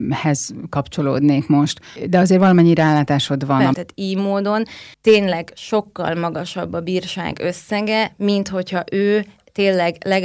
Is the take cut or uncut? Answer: cut